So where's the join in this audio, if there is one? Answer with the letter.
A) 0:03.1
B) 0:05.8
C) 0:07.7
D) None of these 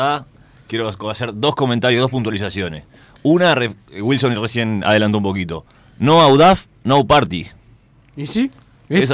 D